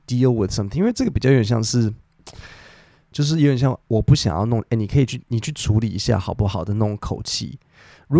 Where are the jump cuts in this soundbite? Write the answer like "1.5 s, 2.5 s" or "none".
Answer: 3.1 s